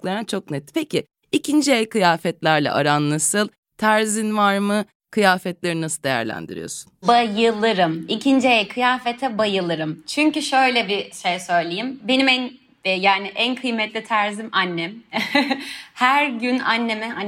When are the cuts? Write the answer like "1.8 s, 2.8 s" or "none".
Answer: none